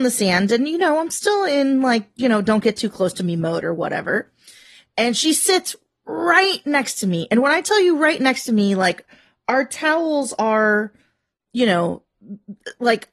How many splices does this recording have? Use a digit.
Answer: 0